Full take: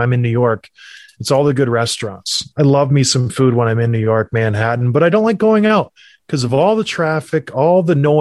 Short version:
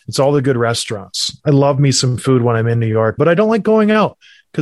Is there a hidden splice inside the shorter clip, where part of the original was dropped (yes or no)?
yes